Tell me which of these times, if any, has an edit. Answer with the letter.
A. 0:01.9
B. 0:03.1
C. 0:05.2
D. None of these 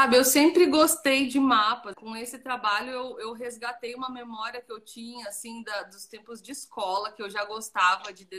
A